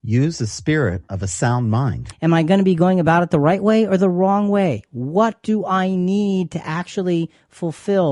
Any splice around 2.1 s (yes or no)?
yes